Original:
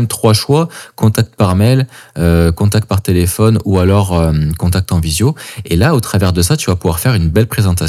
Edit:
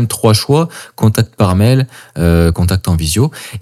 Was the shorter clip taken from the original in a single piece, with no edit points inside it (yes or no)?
no